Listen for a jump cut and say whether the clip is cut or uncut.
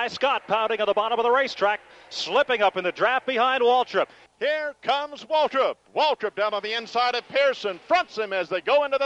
cut